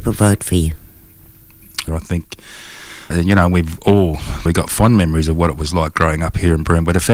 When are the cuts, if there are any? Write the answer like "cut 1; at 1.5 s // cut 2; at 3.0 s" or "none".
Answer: cut 1; at 1.9 s // cut 2; at 3.1 s // cut 3; at 4.5 s